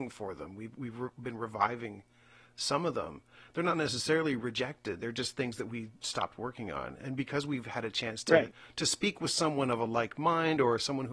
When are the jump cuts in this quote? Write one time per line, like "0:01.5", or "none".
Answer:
none